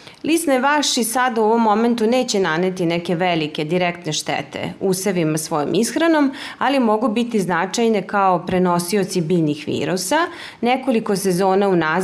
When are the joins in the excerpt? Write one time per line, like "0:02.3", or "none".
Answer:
none